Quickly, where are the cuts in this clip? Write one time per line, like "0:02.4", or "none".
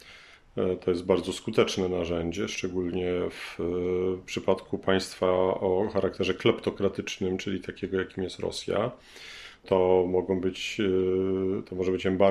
none